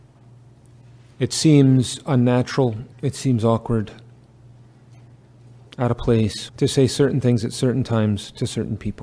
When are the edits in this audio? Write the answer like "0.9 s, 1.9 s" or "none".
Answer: 2.9 s, 6.5 s